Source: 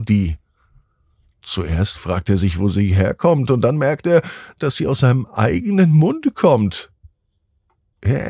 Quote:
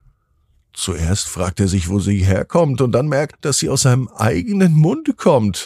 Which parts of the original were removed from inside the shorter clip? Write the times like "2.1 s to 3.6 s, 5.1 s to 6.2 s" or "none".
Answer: 4.0 s to 4.5 s